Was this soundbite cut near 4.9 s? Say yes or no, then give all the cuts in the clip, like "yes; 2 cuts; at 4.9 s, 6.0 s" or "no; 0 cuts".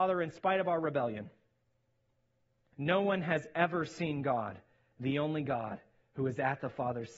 no; 1 cut; at 2.7 s